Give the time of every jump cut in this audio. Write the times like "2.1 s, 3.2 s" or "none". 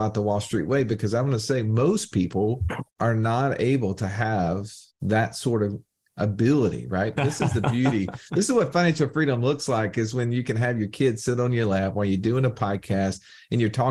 2.9 s, 4.9 s, 7.2 s

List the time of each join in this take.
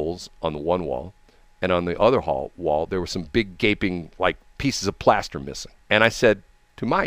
5.8 s

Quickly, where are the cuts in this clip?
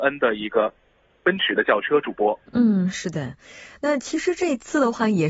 none

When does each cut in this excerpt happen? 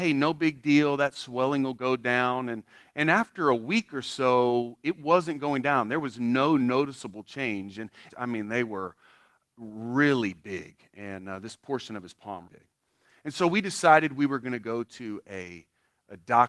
8.1 s, 12.4 s

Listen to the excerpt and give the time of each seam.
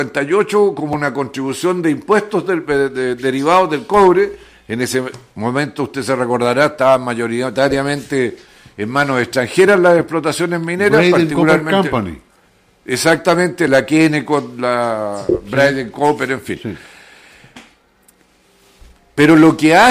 none

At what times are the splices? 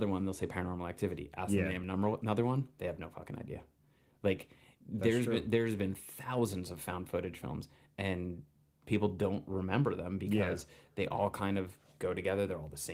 none

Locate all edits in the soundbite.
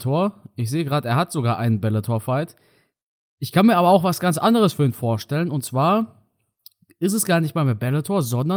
none

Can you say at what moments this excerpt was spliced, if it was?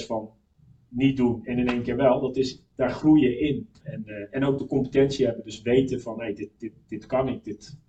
3.8 s

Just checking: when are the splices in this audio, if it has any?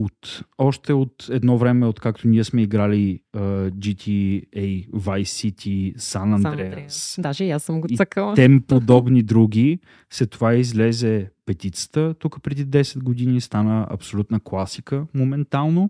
none

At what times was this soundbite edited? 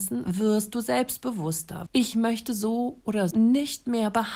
1.9 s, 3.3 s

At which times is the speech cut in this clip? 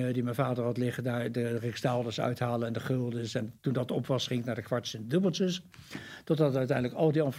3.6 s

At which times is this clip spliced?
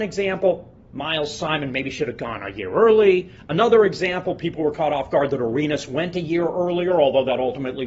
none

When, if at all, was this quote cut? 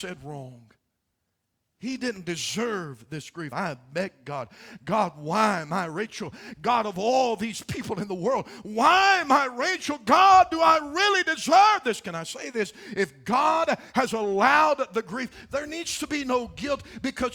3.5 s

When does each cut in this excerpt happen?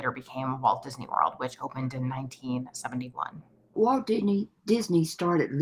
3.7 s

